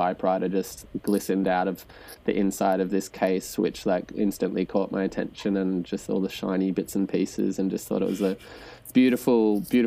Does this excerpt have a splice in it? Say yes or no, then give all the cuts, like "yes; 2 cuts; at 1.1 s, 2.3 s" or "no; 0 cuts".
no; 0 cuts